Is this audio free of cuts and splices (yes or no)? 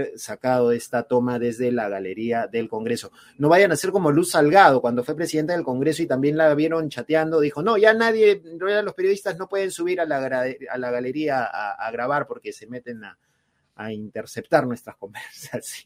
yes